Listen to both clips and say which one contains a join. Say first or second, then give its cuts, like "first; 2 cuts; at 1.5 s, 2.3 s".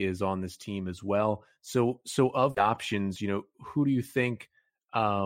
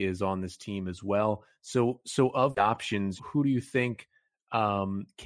second; 1 cut; at 3.2 s